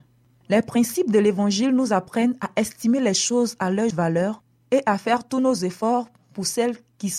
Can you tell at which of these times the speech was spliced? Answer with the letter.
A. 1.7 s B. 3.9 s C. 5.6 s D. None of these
B